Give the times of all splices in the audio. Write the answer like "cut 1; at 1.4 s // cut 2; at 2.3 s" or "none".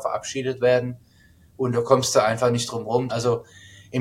cut 1; at 3.1 s